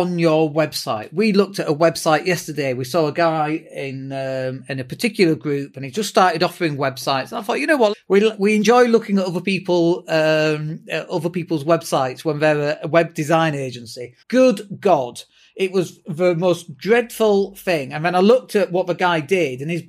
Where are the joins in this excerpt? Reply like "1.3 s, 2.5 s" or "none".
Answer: 7.9 s, 14.2 s